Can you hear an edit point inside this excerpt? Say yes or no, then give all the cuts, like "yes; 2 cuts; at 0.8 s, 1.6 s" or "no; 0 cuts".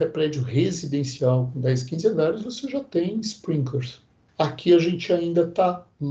yes; 1 cut; at 4.3 s